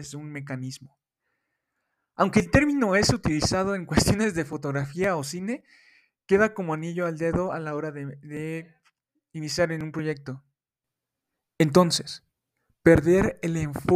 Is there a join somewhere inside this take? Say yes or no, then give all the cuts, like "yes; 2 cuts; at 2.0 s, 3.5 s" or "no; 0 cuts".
no; 0 cuts